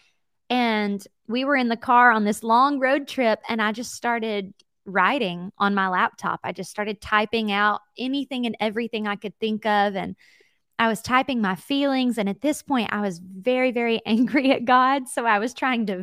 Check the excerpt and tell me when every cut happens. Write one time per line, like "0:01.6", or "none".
none